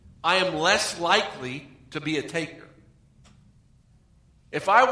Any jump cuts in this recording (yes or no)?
no